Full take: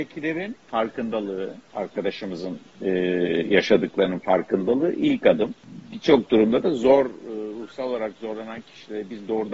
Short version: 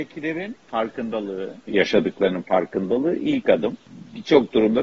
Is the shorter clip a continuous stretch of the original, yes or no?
no